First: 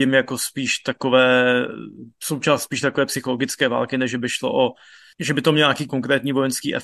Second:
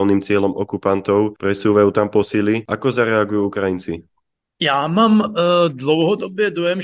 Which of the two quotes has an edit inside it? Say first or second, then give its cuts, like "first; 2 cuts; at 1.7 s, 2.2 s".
first; 1 cut; at 5.9 s